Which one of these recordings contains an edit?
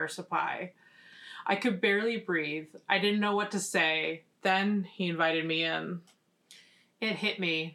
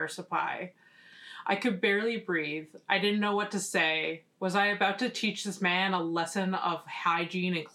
first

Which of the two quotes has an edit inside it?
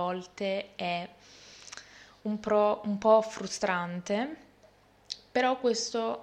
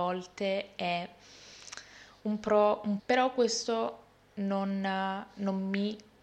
second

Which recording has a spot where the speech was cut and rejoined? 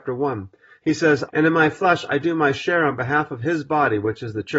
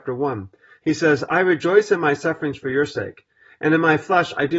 first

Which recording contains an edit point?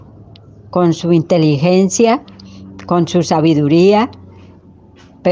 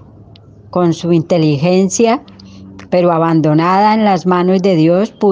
second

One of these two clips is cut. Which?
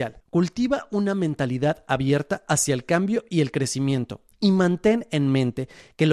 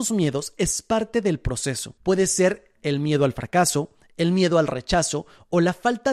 second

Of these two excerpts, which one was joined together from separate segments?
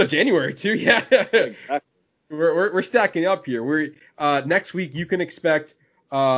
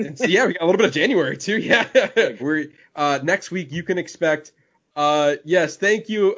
second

